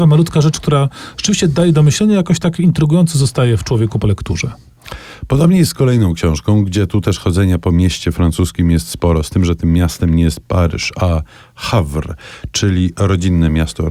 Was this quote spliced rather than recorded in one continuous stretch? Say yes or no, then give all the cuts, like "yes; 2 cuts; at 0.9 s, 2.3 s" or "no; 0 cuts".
no; 0 cuts